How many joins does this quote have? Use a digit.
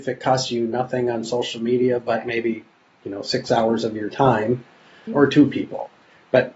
1